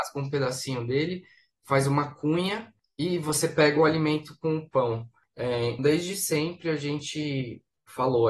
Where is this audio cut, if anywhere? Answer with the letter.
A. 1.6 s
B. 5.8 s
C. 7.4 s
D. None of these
B